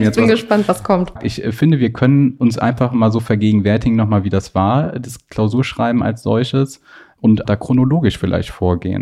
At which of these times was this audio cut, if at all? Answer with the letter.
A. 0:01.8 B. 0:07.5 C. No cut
B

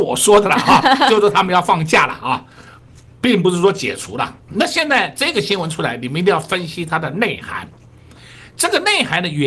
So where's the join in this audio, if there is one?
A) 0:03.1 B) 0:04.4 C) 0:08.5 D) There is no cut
B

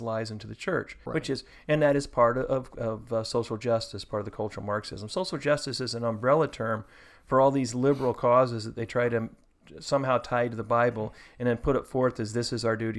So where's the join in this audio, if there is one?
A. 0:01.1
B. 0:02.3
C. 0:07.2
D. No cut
A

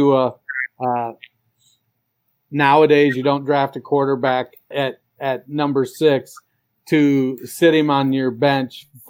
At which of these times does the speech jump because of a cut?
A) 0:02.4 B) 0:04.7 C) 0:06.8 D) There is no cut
B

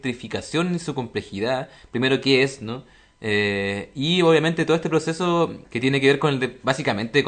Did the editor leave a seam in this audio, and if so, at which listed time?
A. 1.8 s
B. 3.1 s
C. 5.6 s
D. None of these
C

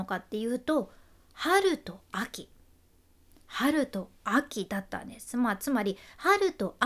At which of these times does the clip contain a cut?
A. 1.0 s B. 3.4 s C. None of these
C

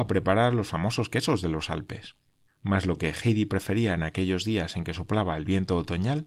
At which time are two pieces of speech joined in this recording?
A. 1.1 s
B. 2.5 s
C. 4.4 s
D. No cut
B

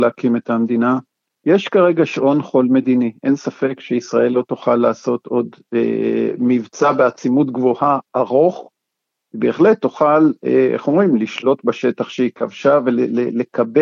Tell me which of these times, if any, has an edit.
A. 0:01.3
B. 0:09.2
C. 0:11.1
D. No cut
A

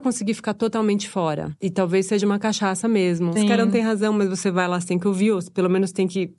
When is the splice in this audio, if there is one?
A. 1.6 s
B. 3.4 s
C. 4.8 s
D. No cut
B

